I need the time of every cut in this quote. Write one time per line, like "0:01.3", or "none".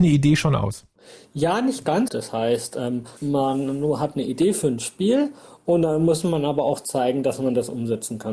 0:02.1
0:03.2

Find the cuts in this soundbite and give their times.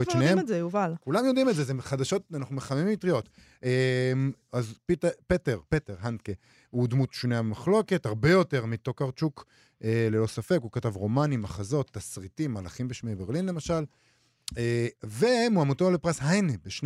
0:05.7

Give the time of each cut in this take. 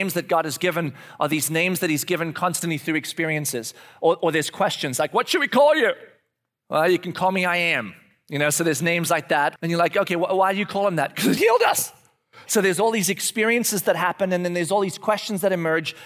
0:09.6
0:11.4

